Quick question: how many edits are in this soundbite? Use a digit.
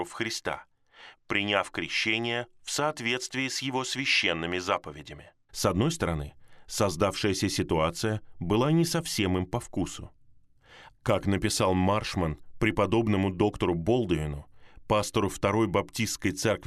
2